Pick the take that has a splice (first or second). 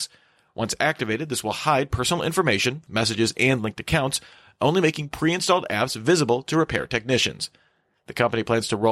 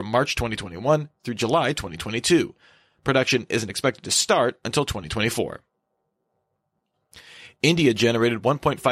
first